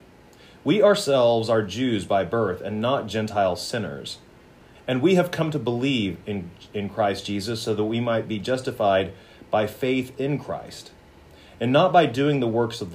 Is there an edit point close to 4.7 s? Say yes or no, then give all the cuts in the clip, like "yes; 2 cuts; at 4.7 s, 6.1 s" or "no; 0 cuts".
yes; 1 cut; at 4.7 s